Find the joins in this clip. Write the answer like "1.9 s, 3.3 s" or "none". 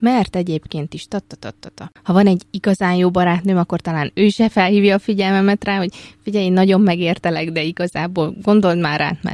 2.0 s

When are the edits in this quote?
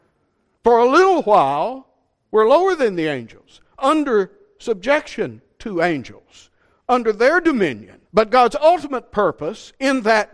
8.1 s

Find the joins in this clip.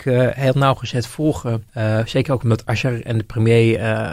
1.7 s

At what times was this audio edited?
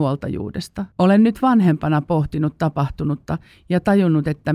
0.9 s

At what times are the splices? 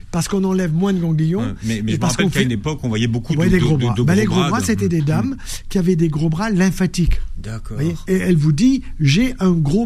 8.0 s

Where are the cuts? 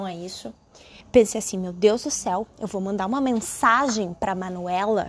1.0 s

